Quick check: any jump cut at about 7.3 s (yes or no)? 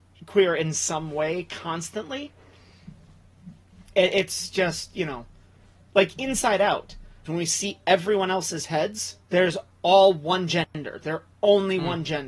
yes